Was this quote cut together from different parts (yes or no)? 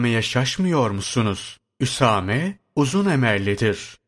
no